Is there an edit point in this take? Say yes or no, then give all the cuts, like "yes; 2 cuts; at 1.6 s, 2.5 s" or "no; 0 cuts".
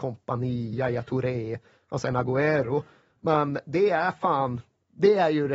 no; 0 cuts